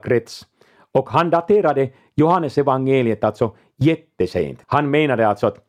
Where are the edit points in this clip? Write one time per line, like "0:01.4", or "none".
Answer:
0:04.6

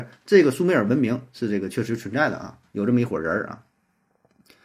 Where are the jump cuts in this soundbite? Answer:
none

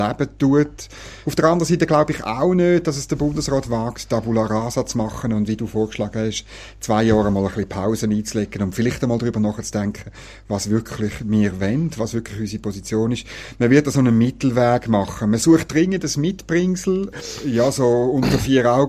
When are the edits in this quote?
0:01.2
0:17.1

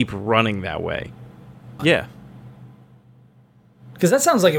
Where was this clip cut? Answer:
0:01.8

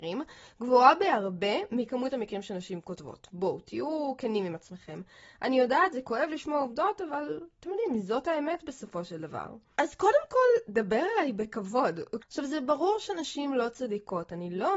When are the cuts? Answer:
0:12.2

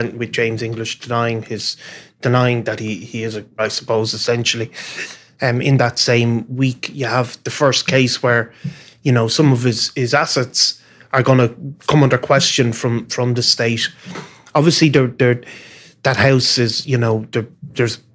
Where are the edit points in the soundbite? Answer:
0:03.6

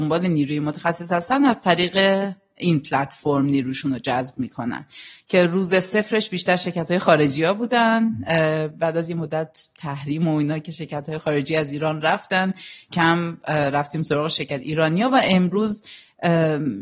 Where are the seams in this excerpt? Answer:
0:12.9

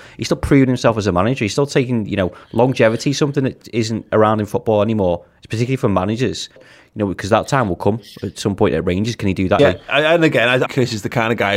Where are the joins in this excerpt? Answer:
0:06.6
0:09.6
0:10.7

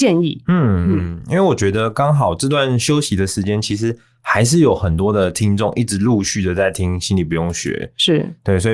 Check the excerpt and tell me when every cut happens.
none

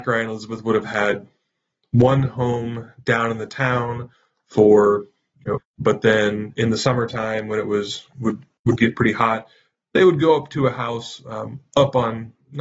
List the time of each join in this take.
0:05.6

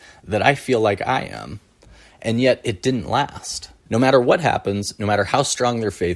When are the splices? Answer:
0:03.9

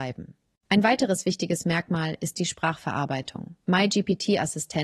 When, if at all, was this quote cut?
0:03.6

